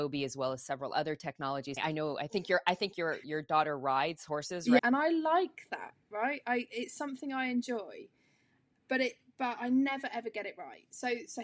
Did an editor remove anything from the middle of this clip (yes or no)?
yes